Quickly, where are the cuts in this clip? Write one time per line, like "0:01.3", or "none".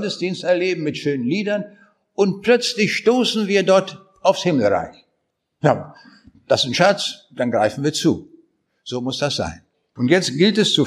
none